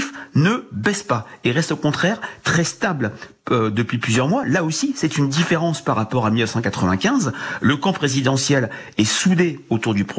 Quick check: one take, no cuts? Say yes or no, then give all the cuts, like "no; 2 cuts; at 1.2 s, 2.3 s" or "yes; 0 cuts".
yes; 0 cuts